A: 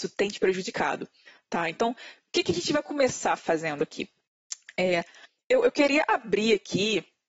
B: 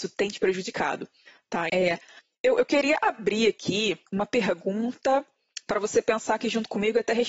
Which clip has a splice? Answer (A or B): B